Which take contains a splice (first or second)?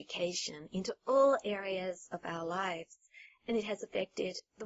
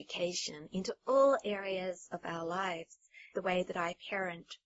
second